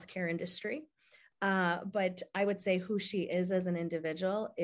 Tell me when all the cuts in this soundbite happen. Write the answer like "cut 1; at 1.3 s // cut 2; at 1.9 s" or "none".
none